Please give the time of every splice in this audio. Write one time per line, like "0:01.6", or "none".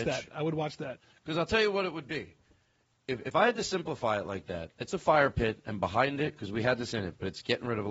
none